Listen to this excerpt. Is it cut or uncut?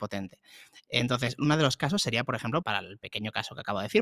cut